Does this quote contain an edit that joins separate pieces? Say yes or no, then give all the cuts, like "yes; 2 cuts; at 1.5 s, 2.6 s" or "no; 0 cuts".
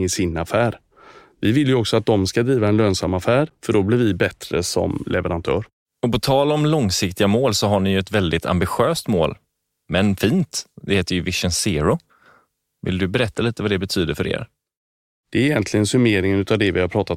no; 0 cuts